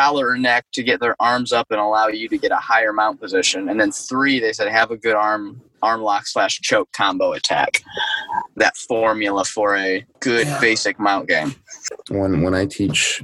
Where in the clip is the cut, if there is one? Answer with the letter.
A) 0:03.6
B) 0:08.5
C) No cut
B